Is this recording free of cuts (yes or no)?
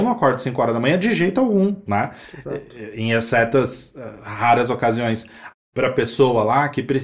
no